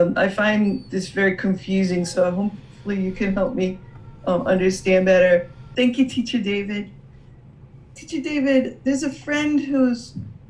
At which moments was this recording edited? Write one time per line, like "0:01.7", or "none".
0:05.7